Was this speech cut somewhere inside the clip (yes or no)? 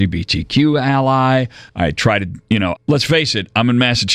yes